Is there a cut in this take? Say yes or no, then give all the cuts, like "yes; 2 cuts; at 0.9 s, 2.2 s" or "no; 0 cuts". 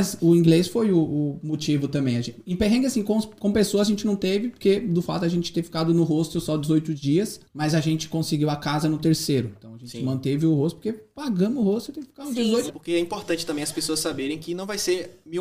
yes; 2 cuts; at 7.5 s, 12.7 s